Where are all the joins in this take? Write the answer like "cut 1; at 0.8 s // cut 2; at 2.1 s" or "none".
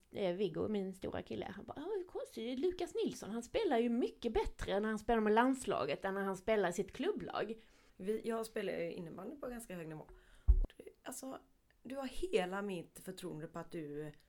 cut 1; at 7.9 s // cut 2; at 10.6 s